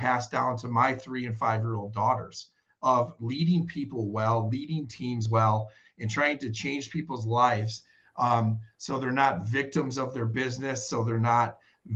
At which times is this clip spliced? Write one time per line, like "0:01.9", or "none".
none